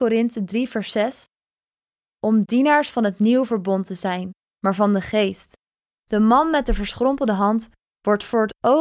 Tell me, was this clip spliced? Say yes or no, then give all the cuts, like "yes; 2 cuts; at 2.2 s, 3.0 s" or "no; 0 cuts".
yes; 2 cuts; at 4.5 s, 5.9 s